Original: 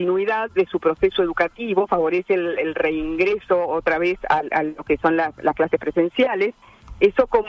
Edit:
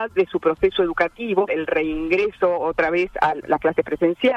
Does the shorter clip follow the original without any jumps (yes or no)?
no